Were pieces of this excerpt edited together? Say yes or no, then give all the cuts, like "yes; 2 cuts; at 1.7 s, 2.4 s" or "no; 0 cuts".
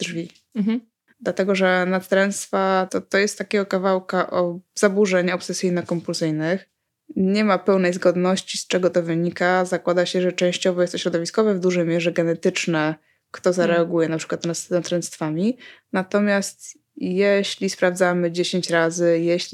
yes; 2 cuts; at 1.1 s, 2.9 s